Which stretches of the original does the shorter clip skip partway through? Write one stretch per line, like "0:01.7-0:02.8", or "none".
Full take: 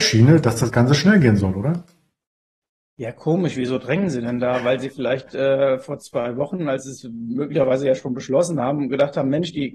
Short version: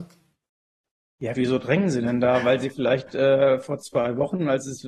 0:03.1-0:03.5